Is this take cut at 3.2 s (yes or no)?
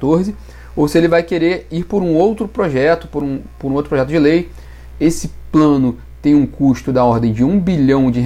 no